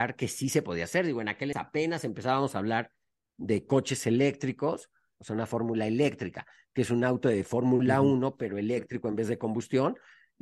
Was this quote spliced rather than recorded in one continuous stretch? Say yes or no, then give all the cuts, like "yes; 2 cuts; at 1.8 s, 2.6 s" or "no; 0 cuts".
yes; 2 cuts; at 1.5 s, 5.2 s